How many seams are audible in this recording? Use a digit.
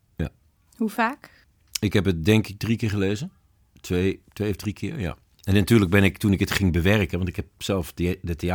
0